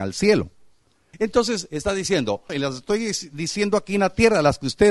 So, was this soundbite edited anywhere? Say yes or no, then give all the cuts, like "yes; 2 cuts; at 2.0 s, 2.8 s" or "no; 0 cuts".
yes; 2 cuts; at 1.1 s, 2.5 s